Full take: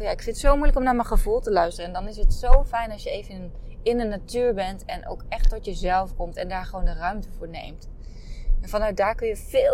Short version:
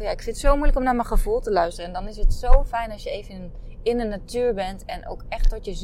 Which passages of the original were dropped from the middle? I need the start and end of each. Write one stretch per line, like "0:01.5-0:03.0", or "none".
none